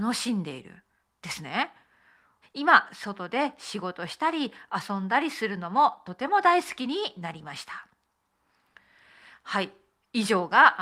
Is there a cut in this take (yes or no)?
yes